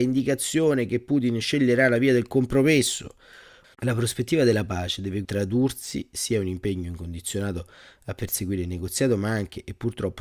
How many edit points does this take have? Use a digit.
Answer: 2